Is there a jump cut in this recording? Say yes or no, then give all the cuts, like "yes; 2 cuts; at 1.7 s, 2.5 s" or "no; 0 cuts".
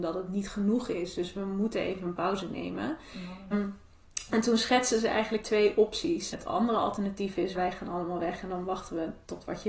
yes; 3 cuts; at 3.5 s, 6.3 s, 7.5 s